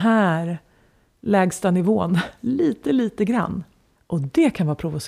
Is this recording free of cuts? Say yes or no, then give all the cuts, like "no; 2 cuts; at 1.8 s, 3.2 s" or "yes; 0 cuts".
no; 1 cut; at 3.9 s